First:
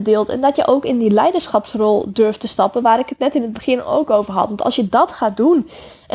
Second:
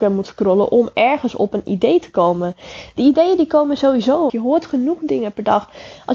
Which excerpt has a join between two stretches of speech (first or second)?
second